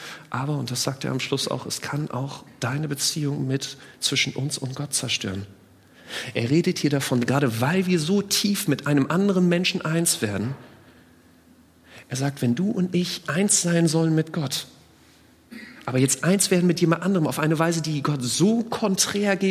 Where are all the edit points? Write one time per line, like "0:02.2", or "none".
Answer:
0:13.2